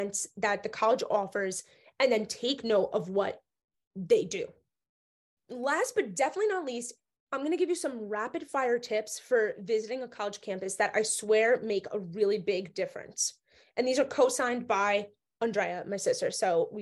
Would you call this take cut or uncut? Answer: cut